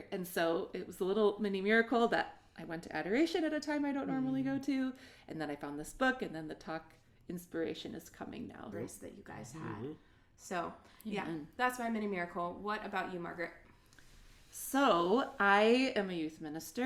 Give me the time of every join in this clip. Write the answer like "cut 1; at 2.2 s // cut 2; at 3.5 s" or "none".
cut 1; at 8.7 s